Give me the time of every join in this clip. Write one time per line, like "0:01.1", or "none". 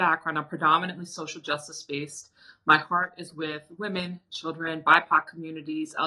none